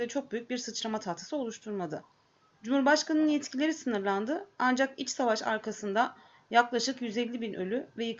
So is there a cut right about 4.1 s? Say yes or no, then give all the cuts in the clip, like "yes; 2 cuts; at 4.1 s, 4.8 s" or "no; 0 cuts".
no; 1 cut; at 2.5 s